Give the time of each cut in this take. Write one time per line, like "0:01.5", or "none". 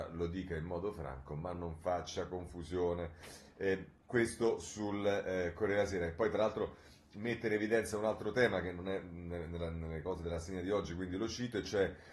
none